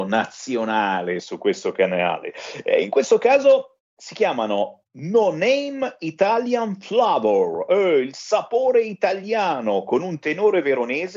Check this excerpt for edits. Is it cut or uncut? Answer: uncut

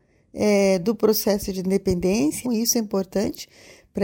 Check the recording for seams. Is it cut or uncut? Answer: cut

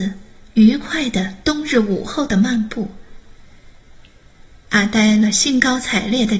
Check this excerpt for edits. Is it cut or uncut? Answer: cut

